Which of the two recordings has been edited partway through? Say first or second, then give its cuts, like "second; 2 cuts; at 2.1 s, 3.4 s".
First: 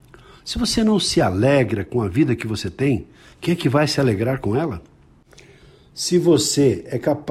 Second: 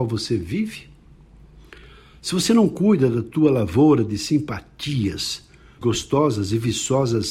second; 1 cut; at 5.8 s